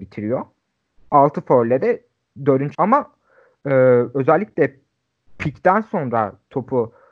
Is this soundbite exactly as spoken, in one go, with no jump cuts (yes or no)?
no